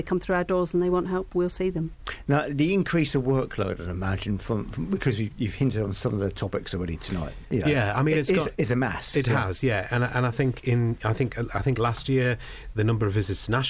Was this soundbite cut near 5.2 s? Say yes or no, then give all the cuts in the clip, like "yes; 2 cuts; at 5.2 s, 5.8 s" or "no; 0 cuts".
no; 0 cuts